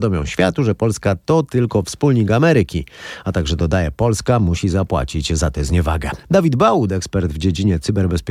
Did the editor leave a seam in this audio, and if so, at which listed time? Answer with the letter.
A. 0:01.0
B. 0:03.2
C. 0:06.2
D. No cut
C